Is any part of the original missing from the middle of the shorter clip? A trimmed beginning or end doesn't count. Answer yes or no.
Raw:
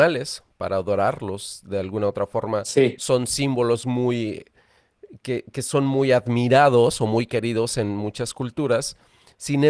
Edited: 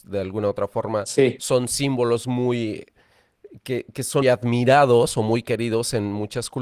yes